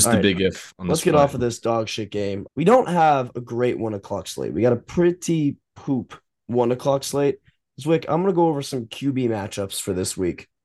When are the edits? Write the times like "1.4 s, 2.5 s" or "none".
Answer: 2.5 s